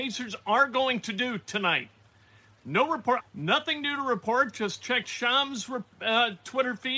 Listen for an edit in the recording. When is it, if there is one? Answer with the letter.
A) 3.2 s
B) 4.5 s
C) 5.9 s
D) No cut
A